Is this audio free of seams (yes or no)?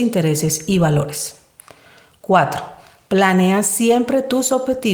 yes